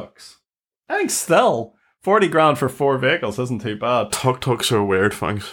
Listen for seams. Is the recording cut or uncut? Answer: uncut